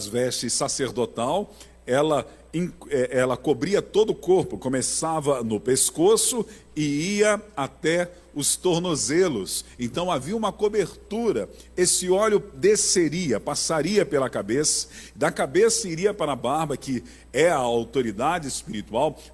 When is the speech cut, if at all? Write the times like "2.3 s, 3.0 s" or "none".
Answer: none